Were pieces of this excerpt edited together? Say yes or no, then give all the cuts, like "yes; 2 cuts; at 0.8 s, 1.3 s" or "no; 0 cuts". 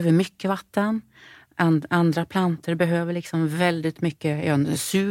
no; 0 cuts